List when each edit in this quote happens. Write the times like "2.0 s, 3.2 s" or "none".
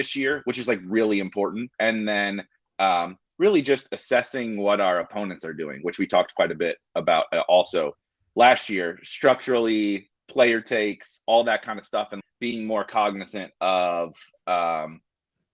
1.7 s, 12.2 s